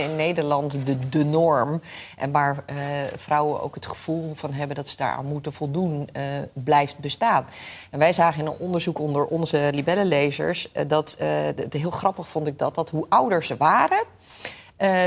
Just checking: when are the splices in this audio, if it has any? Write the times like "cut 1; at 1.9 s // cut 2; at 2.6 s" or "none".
none